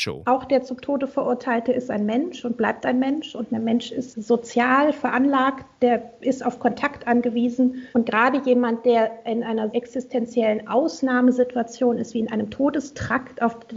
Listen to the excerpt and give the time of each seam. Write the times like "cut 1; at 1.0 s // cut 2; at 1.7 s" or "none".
cut 1; at 7.9 s // cut 2; at 9.7 s